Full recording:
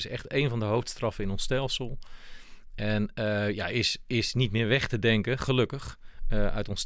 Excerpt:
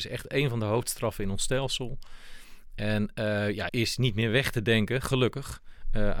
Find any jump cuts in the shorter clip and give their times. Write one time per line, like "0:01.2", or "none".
0:03.7